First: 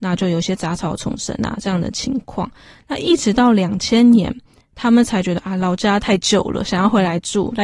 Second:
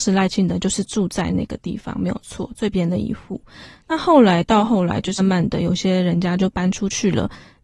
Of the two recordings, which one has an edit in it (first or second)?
second